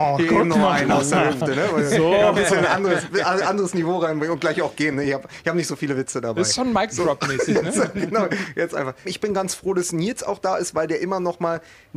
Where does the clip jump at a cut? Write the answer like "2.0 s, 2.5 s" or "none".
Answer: 9.1 s